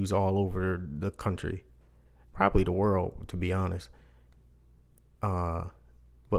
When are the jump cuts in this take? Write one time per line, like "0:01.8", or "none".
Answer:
none